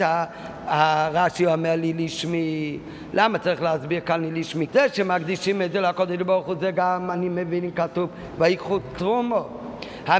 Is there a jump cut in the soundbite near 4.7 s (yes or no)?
yes